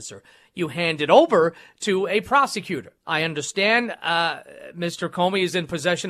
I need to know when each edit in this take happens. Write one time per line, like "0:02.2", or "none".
0:03.0